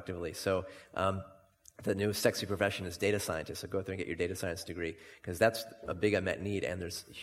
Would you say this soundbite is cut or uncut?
uncut